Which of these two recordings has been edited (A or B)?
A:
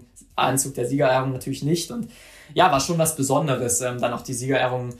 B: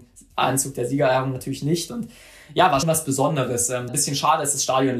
B